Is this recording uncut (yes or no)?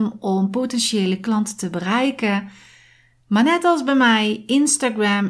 yes